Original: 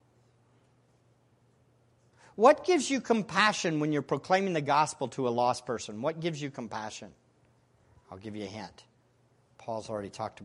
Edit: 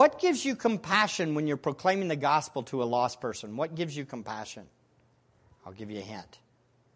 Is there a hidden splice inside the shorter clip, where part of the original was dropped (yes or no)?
no